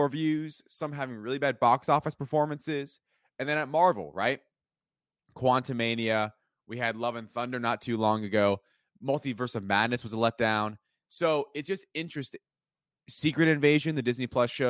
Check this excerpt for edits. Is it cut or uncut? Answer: uncut